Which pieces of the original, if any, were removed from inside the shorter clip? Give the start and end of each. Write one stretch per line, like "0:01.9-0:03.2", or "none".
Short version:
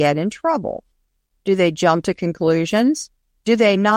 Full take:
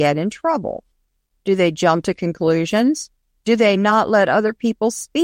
none